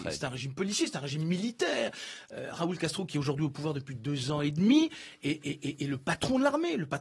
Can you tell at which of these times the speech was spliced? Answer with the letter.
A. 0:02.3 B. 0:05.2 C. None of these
C